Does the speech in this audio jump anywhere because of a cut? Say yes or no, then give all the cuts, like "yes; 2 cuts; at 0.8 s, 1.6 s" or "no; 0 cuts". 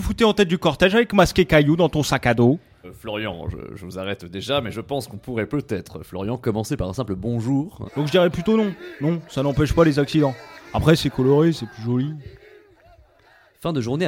yes; 2 cuts; at 2.8 s, 7.9 s